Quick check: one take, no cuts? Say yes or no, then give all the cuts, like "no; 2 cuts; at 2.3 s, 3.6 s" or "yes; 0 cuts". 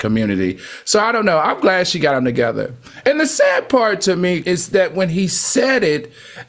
no; 2 cuts; at 3.0 s, 4.4 s